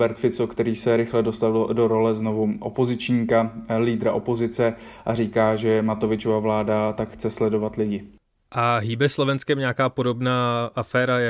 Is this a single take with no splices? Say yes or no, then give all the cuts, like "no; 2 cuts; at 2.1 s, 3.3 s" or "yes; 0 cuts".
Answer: yes; 0 cuts